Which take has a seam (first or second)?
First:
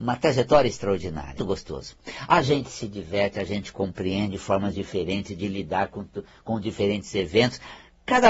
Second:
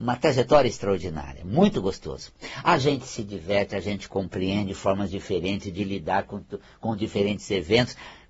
first